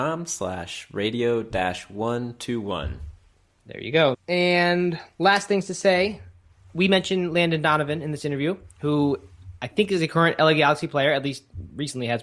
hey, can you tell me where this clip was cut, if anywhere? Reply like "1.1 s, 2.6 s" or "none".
4.1 s